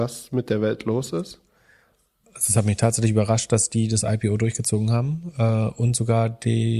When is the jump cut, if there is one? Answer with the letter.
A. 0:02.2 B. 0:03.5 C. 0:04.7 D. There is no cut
D